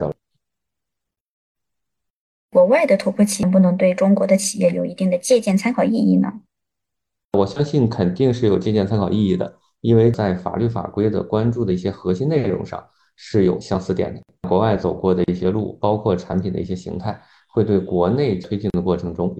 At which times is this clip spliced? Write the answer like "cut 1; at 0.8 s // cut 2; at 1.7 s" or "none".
cut 1; at 3.4 s